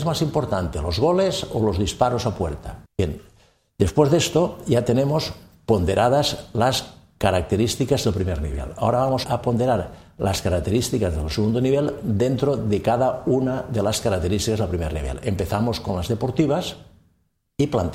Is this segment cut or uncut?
cut